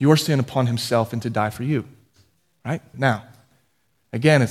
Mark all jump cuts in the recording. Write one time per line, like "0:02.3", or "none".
0:02.9